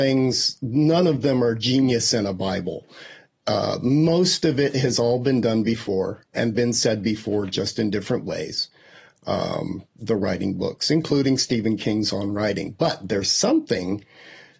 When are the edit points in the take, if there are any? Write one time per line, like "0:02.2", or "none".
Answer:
0:06.3

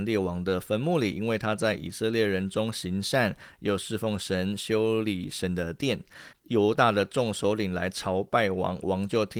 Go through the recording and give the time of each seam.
0:06.3

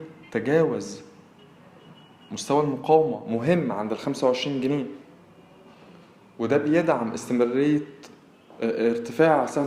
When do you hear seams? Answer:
none

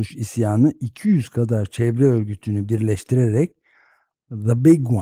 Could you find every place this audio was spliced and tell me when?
none

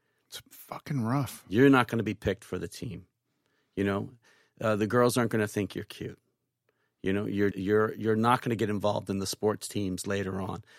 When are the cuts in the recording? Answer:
0:07.5

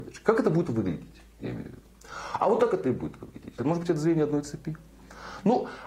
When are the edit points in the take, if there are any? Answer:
0:03.6

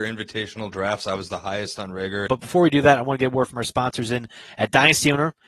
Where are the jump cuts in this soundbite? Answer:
0:02.3

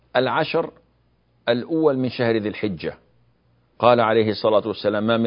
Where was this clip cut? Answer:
none

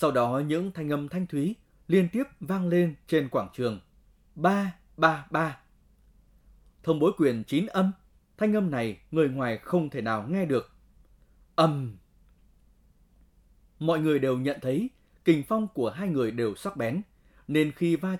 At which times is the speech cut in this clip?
0:04.9
0:08.3

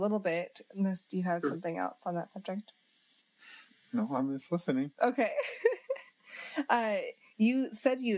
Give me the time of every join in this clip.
none

